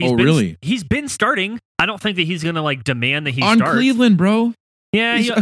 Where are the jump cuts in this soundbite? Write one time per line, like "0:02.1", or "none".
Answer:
0:01.7